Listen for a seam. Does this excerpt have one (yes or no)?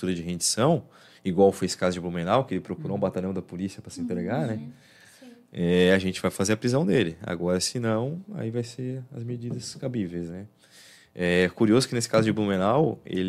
no